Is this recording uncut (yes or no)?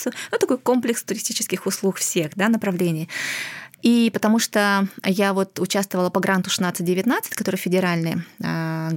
yes